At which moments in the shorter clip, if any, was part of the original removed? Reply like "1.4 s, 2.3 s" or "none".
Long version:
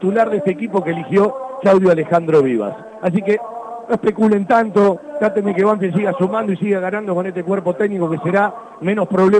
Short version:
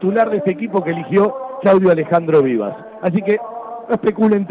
none

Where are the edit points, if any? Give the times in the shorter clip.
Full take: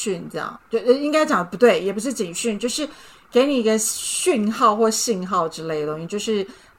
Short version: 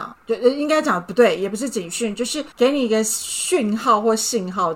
2.5 s

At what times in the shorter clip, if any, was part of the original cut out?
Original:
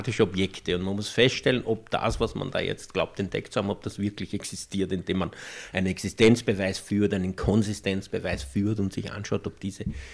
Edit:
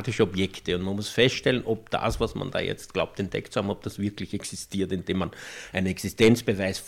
none

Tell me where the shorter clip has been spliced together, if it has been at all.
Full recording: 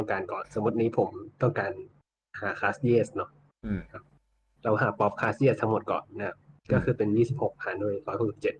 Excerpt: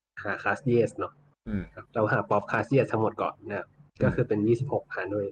1.9 s

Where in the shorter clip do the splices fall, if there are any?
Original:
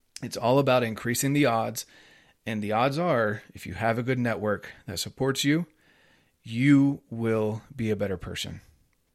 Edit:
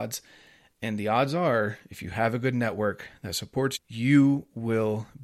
3.7 s

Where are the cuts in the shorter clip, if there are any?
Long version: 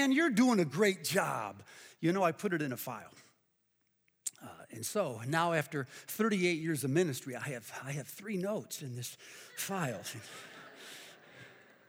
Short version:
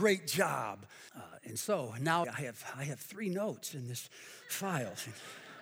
1.1 s, 2.2 s

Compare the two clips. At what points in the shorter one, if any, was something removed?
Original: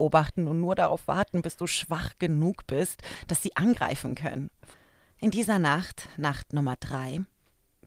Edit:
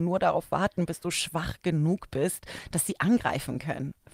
none

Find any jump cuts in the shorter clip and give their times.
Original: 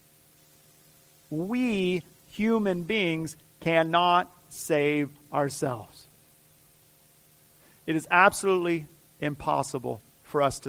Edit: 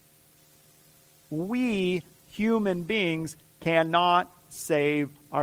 none

